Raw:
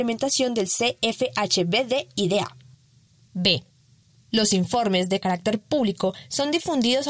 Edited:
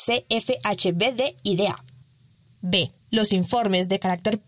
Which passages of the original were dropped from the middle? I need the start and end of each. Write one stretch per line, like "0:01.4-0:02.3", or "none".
0:03.7-0:04.2